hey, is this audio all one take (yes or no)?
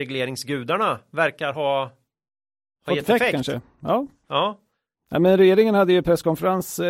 yes